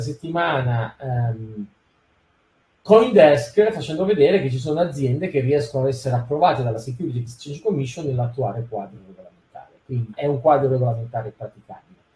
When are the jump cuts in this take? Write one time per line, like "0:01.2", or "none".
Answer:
0:10.1